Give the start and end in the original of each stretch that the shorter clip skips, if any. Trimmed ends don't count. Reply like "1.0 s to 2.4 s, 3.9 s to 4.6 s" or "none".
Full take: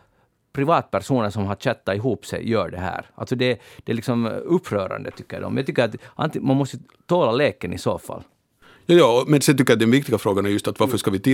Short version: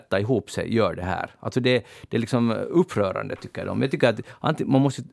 none